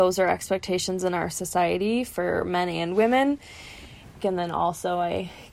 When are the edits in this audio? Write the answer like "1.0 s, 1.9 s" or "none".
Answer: 4.2 s